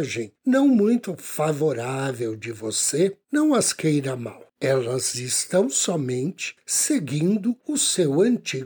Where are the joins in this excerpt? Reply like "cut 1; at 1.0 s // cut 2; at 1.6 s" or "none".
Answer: none